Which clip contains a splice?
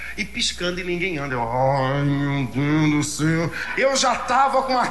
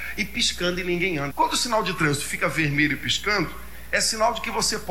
second; 1 cut; at 1.3 s

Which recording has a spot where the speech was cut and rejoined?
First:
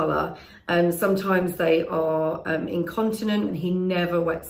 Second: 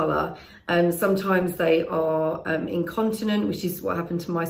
first; 1 cut; at 3.5 s

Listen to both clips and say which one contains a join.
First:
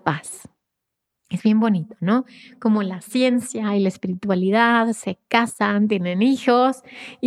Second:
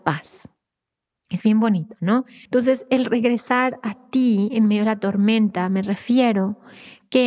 second; 1 cut; at 2.5 s

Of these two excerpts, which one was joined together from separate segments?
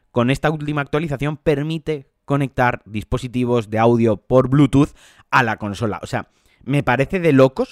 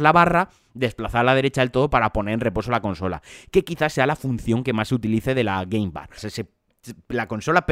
second; 1 cut; at 6.2 s

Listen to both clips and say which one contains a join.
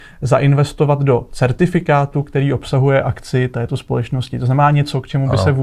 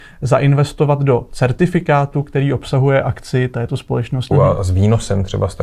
second; 1 cut; at 4.3 s

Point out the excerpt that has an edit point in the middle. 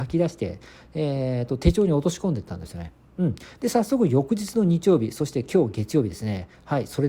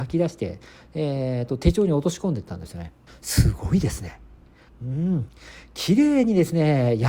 second; 2 cuts; at 3.1 s, 4.7 s

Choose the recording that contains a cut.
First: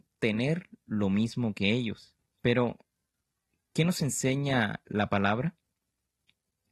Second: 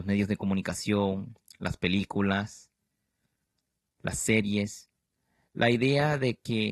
first; 1 cut; at 2.3 s

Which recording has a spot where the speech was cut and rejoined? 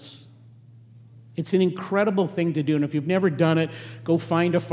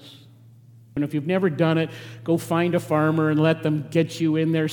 second; 1 cut; at 1.0 s

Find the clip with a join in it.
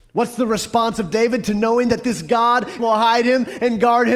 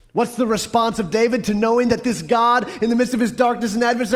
first; 1 cut; at 2.8 s

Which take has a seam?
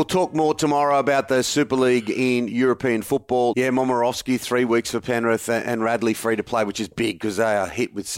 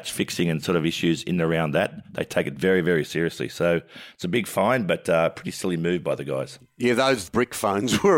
first; 1 cut; at 3.5 s

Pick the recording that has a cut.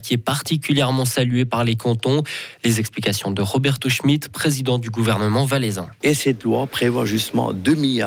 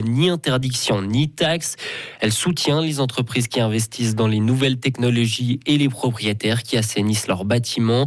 first; 1 cut; at 6.0 s

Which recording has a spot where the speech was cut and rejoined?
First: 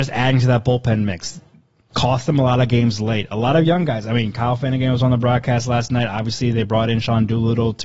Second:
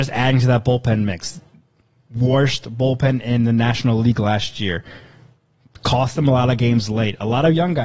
first; 1 cut; at 1.9 s

